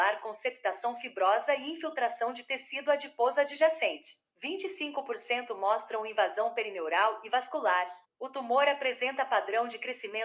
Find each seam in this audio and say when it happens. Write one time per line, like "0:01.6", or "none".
0:04.3
0:08.0